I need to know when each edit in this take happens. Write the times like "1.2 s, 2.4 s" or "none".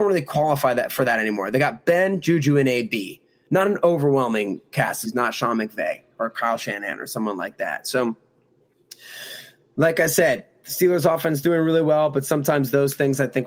5.0 s